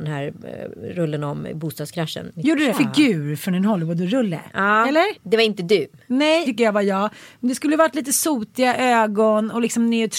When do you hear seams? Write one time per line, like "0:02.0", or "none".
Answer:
0:02.7
0:05.2
0:06.5